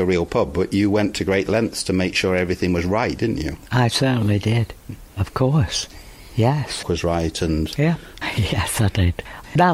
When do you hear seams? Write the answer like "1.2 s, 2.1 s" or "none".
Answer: 6.8 s, 8.2 s